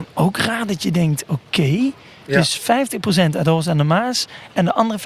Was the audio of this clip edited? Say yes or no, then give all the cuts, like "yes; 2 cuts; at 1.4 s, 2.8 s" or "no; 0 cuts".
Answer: no; 0 cuts